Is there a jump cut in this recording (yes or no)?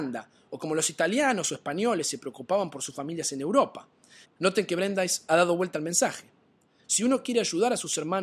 yes